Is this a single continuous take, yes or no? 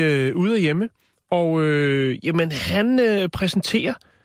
yes